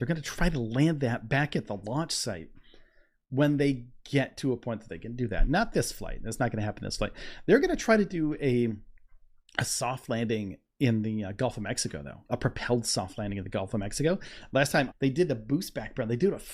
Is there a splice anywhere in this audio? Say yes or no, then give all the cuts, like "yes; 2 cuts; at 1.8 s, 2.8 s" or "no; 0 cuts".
yes; 1 cut; at 14.9 s